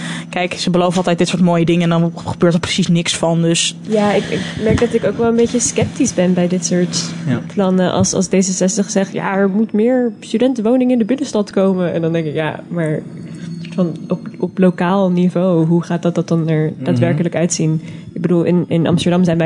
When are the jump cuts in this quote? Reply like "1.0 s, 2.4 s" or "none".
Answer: none